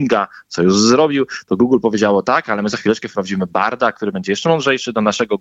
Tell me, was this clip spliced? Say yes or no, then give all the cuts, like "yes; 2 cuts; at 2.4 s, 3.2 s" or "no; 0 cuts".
no; 0 cuts